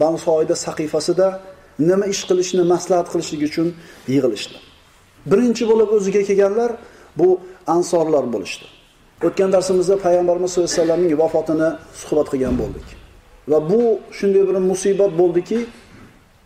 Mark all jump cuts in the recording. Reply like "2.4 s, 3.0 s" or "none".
5.2 s, 9.2 s